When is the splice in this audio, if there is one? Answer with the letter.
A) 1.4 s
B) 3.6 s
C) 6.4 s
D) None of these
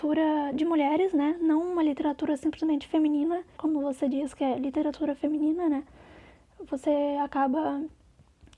B